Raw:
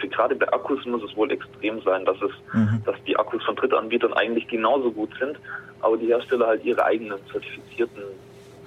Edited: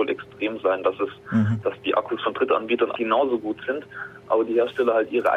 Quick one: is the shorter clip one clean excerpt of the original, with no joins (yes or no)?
no